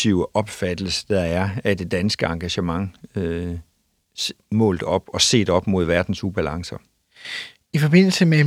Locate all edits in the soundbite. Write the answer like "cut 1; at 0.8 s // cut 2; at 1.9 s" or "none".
none